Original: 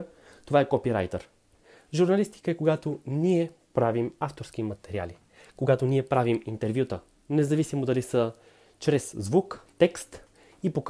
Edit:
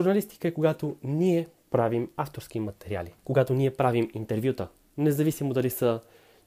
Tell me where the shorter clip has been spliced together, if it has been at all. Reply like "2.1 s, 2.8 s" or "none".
3.2 s